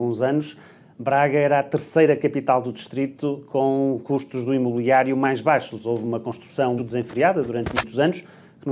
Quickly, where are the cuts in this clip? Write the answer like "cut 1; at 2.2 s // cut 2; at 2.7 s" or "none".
cut 1; at 6.8 s